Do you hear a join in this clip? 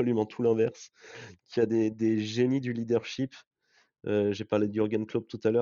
no; 0 cuts

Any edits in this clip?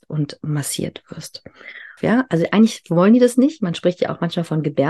yes; 1 cut; at 2.0 s

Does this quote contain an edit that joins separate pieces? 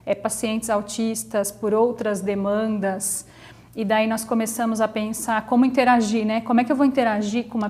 no; 0 cuts

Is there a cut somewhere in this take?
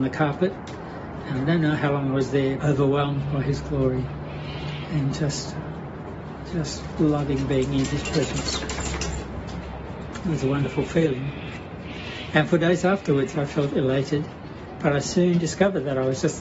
yes; 1 cut; at 2.6 s

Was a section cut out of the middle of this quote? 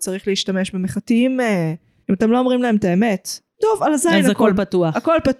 yes; 2 cuts; at 2.0 s, 3.5 s

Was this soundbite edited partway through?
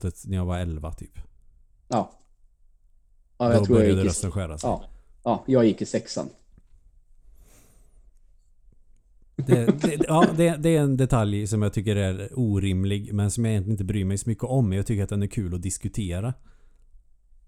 no; 0 cuts

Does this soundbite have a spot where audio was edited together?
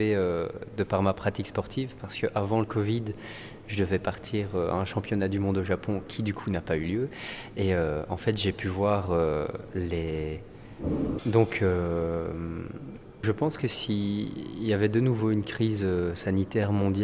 yes; 2 cuts; at 11.2 s, 13.2 s

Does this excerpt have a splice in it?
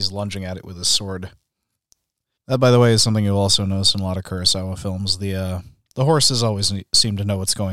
yes; 1 cut; at 2.4 s

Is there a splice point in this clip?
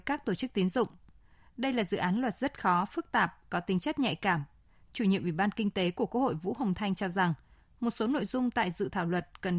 no; 0 cuts

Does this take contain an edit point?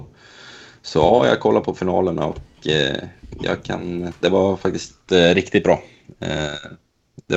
no; 0 cuts

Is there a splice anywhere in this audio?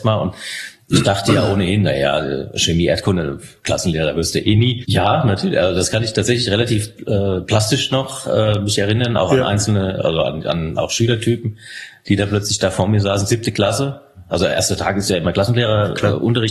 yes; 1 cut; at 4.8 s

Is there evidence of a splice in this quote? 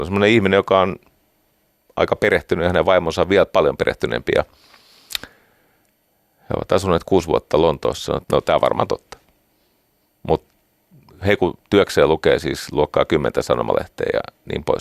yes; 2 cuts; at 8.2 s, 11.6 s

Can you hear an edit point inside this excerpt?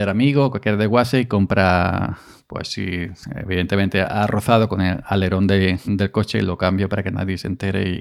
yes; 1 cut; at 5.8 s

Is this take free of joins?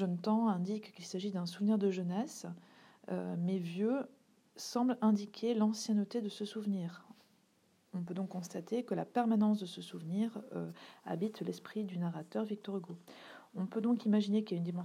yes; 0 cuts

